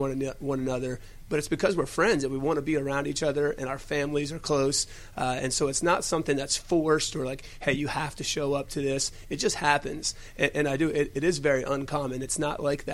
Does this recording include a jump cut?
no; 0 cuts

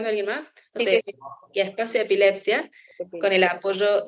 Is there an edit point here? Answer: yes; 1 cut; at 1.0 s

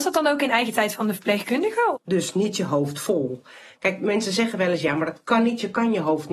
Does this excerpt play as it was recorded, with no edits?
no; 1 cut; at 1.9 s

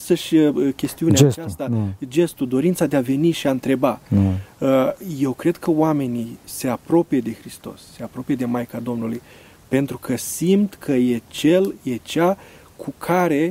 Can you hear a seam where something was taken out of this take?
no; 0 cuts

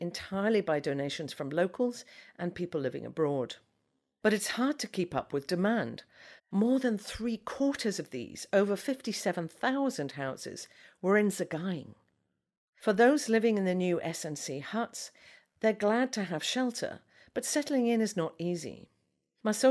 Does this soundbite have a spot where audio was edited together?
yes; 1 cut; at 6.4 s

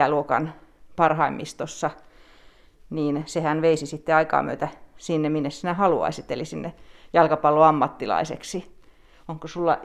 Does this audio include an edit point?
no; 0 cuts

